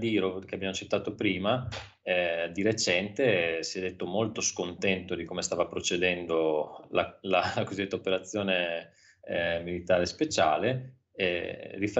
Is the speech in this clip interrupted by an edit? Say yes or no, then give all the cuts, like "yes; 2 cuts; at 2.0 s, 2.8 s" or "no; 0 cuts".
no; 0 cuts